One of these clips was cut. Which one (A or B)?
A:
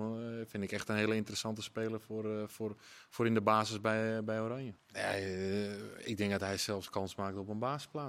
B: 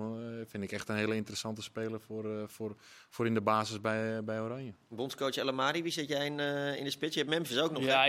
A